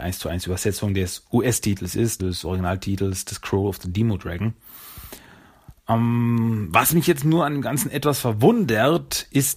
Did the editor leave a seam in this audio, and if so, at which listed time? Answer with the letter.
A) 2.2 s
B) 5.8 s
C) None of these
A